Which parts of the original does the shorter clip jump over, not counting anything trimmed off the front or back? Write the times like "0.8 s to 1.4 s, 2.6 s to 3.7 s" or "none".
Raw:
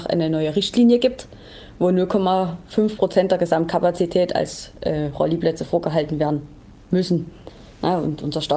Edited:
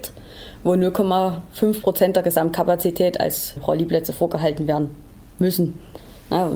4.7 s to 5.1 s